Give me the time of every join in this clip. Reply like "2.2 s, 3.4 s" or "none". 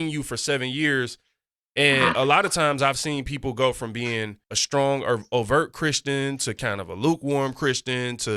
4.4 s